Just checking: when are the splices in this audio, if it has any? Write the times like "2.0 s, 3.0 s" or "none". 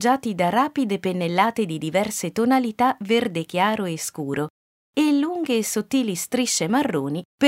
4.7 s